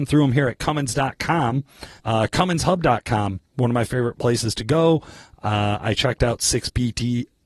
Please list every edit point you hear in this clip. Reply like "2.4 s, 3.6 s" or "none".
2.0 s